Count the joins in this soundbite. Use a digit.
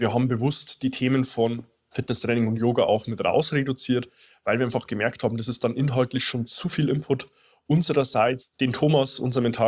1